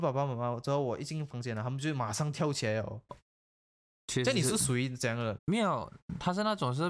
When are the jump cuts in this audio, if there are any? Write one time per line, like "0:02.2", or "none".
0:03.1
0:05.4